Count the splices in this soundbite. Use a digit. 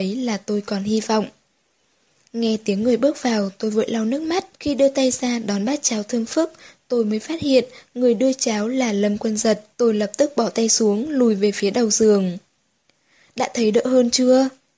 2